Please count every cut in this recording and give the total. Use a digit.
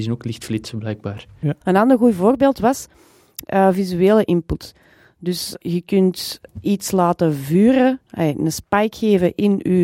1